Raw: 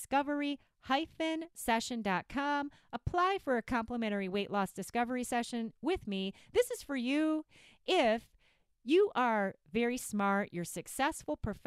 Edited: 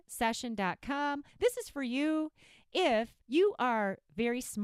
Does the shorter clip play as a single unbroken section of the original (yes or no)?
no